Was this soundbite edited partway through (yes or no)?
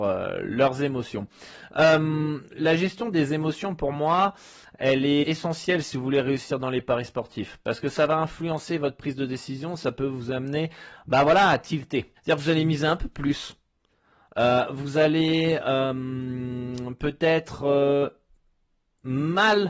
yes